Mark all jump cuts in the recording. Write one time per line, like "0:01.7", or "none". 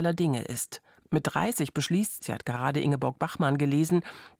0:01.0
0:02.2